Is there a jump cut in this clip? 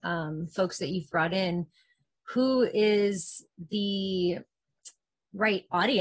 no; 0 cuts

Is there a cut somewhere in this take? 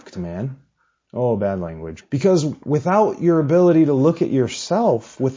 yes; 1 cut; at 2.0 s

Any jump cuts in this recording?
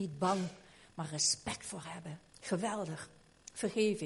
yes; 1 cut; at 2.3 s

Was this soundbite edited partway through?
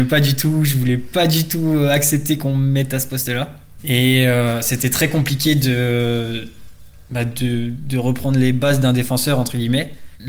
no; 0 cuts

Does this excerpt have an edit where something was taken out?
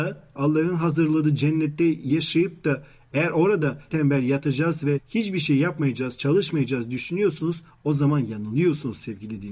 yes; 1 cut; at 3.9 s

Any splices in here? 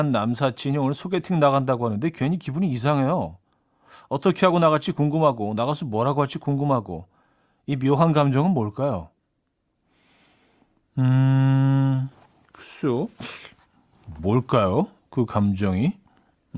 no; 0 cuts

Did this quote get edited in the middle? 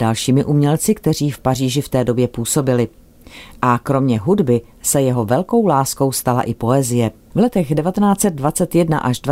yes; 1 cut; at 7.3 s

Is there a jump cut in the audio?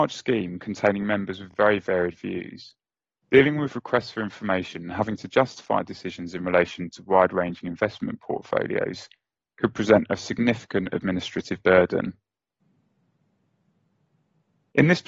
no; 0 cuts

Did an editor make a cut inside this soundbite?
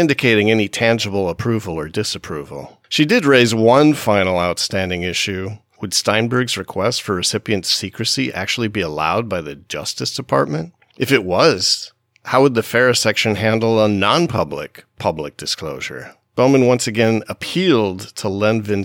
no; 0 cuts

